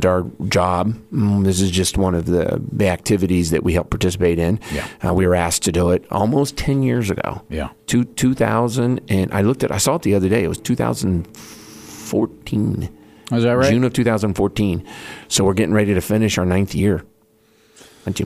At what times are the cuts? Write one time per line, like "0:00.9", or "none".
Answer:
none

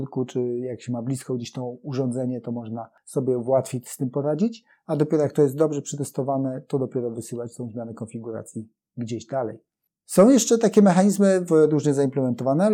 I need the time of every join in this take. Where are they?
0:11.5

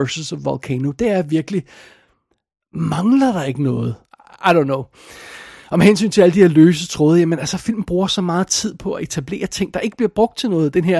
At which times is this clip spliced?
0:04.1

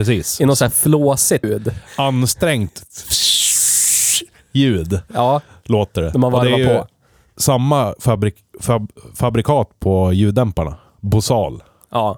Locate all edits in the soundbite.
0:01.4

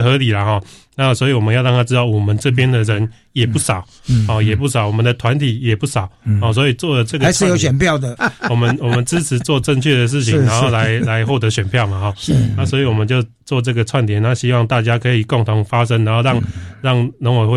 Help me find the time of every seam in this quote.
0:08.2

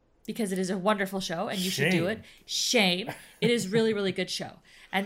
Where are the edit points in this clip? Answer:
none

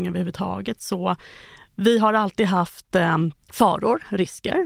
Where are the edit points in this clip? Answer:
0:03.4

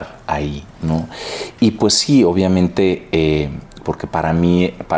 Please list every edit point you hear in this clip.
0:03.8

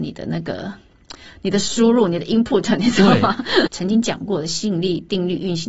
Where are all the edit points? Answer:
0:03.7

